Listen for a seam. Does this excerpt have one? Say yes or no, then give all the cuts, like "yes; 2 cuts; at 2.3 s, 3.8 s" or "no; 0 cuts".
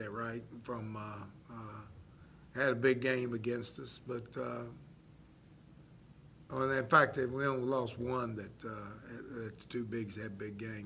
no; 0 cuts